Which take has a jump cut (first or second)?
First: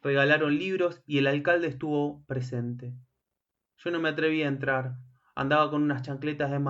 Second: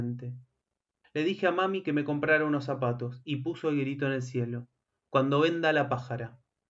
second